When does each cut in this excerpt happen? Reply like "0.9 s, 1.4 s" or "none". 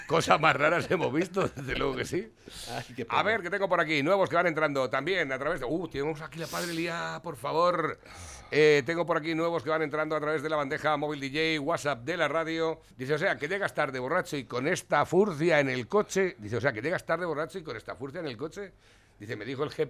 12.9 s